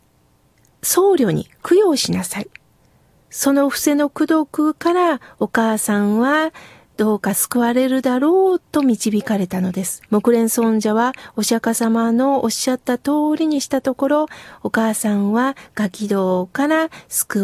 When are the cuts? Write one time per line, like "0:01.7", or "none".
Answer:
0:10.1